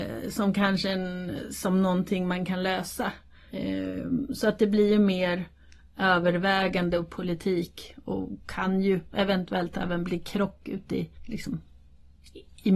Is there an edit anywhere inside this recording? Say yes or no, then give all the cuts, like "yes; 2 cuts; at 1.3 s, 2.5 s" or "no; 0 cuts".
yes; 2 cuts; at 3.5 s, 11.1 s